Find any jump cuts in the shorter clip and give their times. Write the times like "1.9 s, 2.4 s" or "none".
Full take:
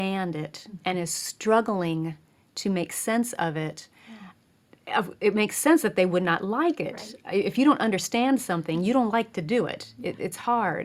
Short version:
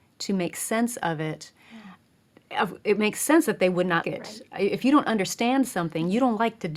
4.0 s